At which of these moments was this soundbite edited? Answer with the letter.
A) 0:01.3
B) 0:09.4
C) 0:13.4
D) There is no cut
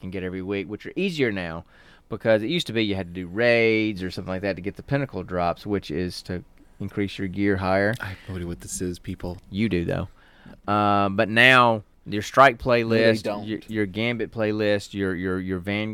B